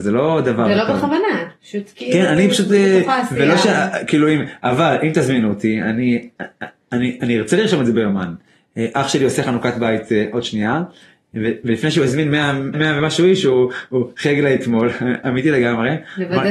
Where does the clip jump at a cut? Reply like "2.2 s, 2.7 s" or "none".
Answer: 12.7 s